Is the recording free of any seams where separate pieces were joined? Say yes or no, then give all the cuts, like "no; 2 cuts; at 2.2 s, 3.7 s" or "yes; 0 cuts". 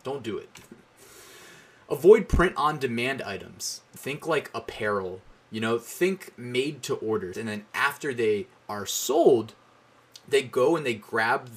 no; 2 cuts; at 4.0 s, 7.3 s